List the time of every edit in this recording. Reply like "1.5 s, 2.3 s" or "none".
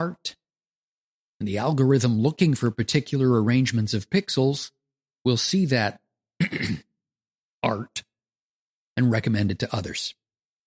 none